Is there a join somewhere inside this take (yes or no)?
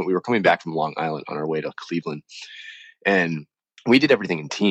no